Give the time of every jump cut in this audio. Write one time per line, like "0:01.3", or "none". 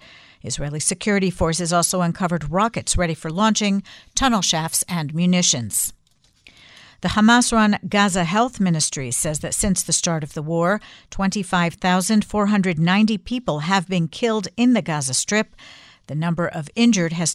none